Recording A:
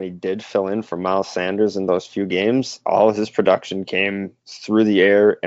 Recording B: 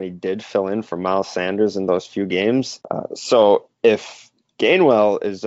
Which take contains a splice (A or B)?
B